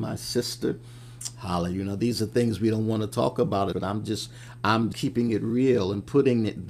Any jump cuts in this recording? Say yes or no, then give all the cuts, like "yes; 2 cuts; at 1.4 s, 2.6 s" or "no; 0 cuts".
yes; 2 cuts; at 3.7 s, 4.9 s